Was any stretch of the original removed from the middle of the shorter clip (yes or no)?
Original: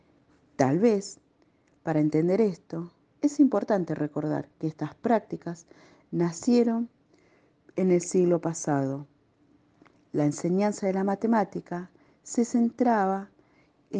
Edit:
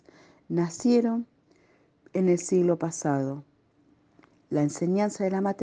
no